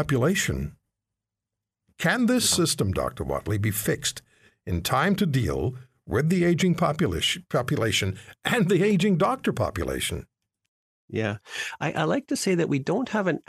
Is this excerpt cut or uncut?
uncut